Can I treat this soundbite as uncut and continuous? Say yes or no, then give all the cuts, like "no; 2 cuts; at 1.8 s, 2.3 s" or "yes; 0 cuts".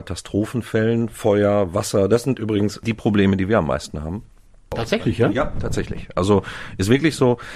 yes; 0 cuts